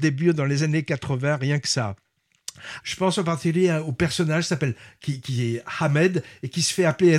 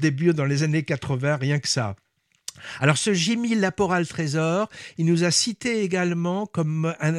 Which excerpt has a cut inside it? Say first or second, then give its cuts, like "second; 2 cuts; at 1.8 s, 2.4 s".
first; 1 cut; at 2.8 s